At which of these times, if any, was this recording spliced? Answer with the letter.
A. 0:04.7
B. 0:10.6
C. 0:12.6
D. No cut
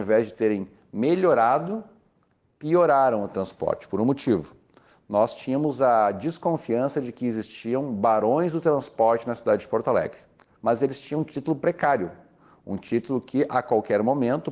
B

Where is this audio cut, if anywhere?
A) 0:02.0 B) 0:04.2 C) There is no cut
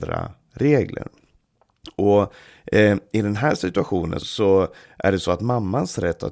B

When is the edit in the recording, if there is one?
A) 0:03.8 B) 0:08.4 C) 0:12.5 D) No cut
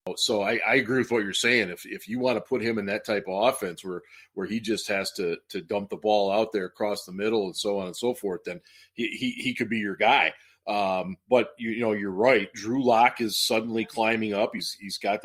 D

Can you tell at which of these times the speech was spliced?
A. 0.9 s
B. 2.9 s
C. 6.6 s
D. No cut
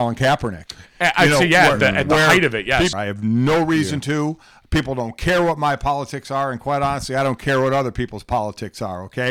B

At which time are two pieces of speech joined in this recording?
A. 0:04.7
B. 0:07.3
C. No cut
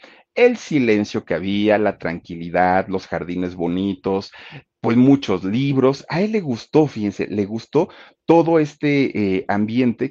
C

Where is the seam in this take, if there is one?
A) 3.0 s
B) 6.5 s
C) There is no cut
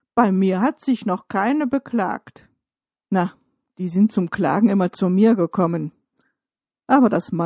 A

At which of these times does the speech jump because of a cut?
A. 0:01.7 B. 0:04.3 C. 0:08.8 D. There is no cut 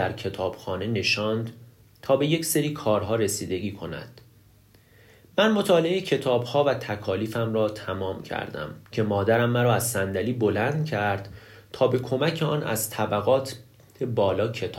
C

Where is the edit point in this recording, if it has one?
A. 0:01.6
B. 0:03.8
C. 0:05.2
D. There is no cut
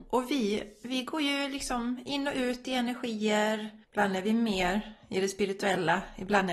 B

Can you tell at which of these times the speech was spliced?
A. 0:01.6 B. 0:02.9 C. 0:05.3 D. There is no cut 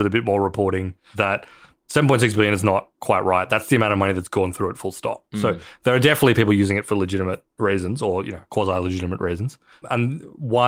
B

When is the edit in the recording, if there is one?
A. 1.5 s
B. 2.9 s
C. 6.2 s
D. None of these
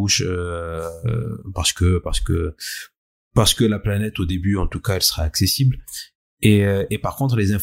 D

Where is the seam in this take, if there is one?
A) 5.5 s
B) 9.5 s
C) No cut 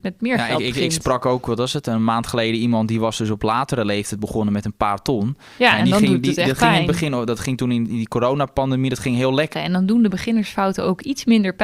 B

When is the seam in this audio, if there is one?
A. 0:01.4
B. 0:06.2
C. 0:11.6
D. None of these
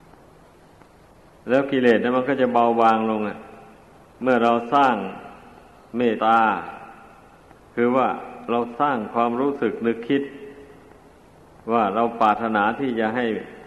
B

